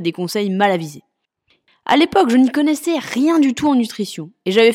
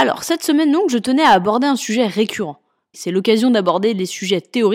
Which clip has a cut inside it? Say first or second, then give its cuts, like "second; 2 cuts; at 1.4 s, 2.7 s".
second; 1 cut; at 2.9 s